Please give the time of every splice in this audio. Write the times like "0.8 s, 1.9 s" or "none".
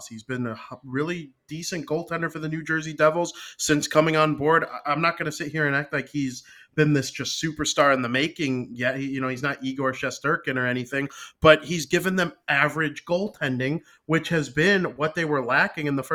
none